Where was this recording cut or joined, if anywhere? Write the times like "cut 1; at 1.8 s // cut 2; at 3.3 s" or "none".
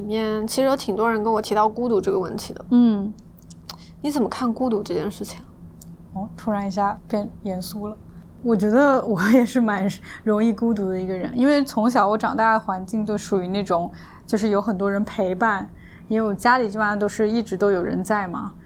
none